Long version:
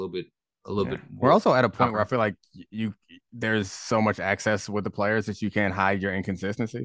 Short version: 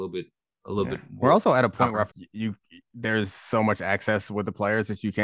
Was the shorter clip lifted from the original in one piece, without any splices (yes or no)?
no